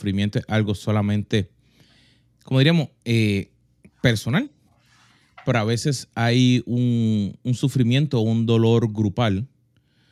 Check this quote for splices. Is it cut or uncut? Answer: uncut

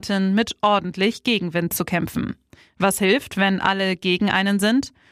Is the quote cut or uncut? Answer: uncut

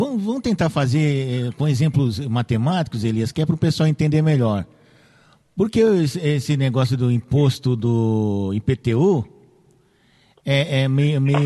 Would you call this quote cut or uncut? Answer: uncut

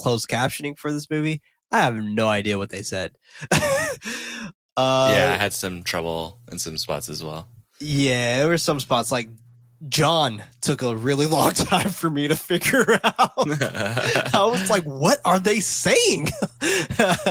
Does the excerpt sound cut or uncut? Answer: uncut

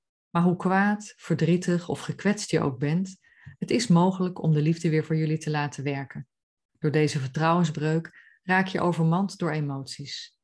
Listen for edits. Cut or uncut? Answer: cut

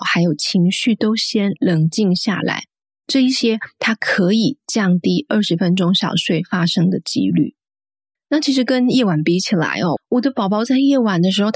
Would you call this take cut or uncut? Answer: cut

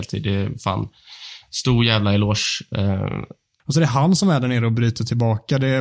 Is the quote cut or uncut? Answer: cut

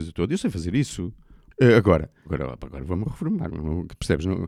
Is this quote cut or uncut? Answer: cut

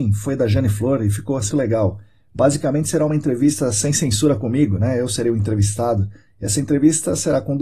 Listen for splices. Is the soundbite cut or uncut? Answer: cut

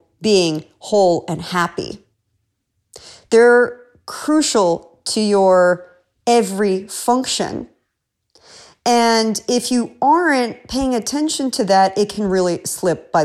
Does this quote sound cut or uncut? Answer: uncut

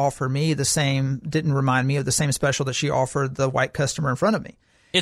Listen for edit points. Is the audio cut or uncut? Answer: uncut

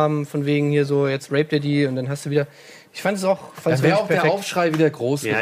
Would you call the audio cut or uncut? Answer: uncut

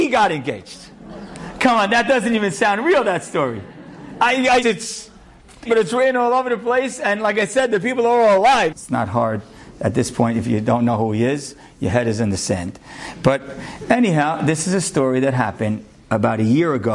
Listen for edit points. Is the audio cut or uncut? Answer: cut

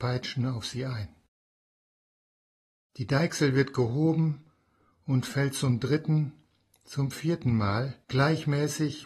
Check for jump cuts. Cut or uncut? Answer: cut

